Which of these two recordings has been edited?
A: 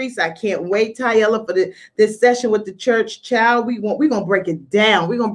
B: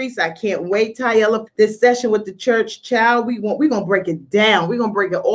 B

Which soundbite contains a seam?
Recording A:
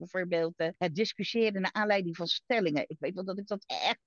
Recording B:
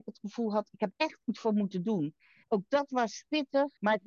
B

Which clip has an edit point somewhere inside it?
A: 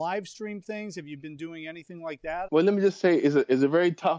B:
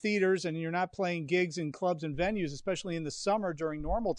A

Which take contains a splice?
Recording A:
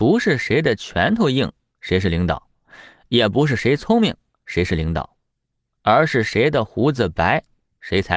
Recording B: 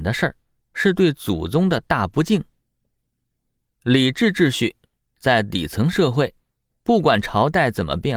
B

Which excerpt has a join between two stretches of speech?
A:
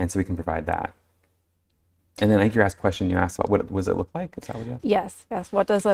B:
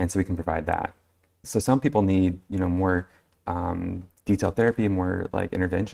B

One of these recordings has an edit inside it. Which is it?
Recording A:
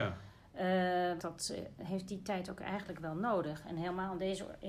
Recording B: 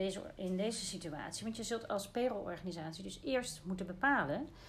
A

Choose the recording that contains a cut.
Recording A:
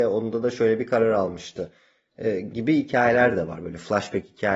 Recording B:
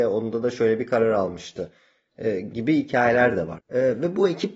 B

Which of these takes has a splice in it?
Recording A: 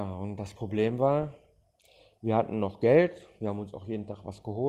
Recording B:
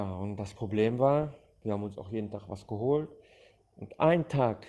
B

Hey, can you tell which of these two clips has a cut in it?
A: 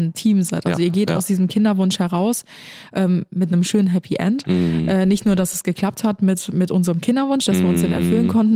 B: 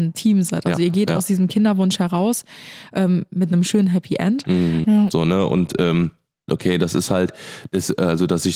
B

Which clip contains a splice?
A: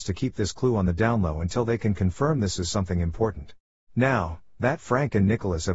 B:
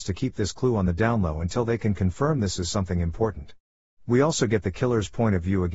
A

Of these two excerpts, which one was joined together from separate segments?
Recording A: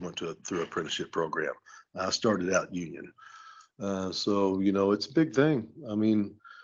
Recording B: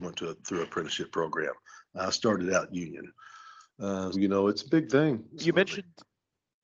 B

